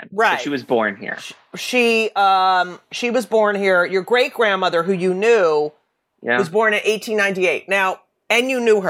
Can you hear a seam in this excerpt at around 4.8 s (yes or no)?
no